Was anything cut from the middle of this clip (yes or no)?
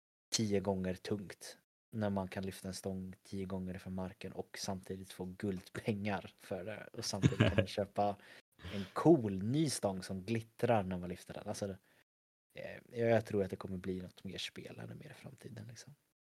no